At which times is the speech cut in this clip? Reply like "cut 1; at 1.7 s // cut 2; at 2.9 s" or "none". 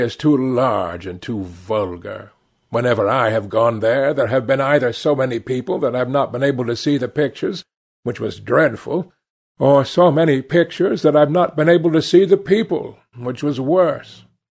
none